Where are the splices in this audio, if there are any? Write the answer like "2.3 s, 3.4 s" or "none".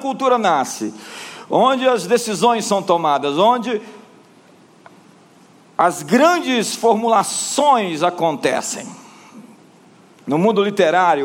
none